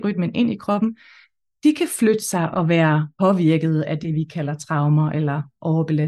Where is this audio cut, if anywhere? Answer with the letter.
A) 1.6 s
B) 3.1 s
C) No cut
B